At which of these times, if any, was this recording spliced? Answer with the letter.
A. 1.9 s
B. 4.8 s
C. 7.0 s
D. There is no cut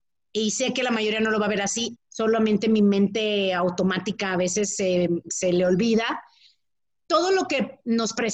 A